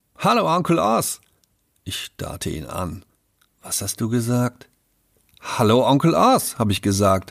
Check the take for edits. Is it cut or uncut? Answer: uncut